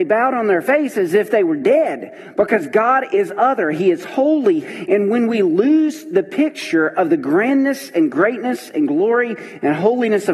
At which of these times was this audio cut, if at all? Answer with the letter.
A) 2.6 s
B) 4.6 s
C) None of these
B